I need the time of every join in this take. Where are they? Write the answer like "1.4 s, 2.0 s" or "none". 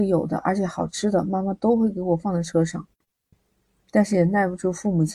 3.3 s